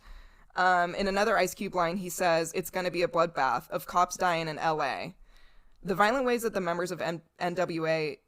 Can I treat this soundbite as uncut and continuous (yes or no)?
no